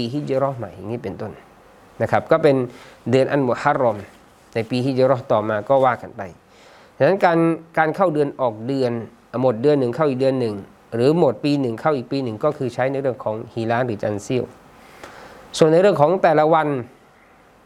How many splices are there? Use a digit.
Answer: 0